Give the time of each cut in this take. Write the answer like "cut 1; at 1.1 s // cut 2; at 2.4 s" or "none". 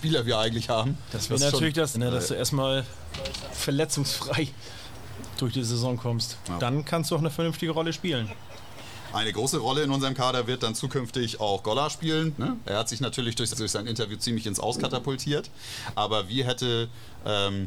cut 1; at 1.9 s // cut 2; at 12.4 s // cut 3; at 13.5 s